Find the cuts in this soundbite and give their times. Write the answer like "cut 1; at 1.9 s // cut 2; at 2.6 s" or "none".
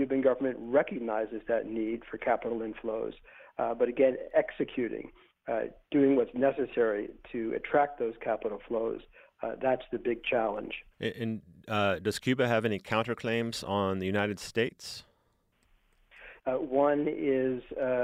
cut 1; at 10.9 s // cut 2; at 16.4 s